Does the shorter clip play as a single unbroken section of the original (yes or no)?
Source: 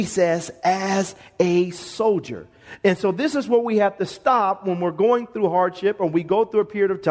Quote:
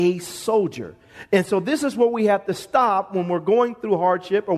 yes